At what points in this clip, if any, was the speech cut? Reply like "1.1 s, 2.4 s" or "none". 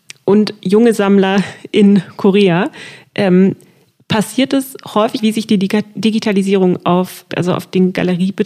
5.2 s, 7.3 s